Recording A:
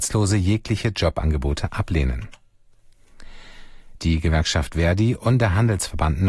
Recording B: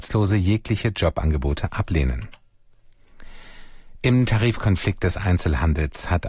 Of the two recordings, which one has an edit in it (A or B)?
A